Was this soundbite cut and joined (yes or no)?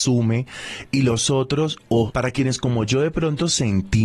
yes